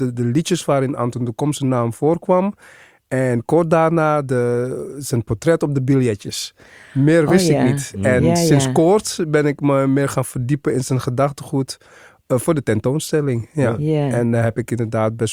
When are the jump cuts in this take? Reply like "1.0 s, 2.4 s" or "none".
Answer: none